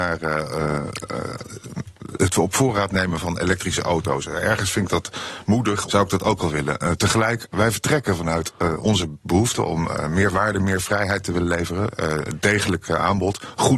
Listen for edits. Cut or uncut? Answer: cut